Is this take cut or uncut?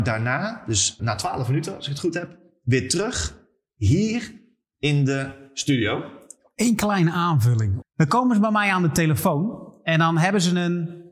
cut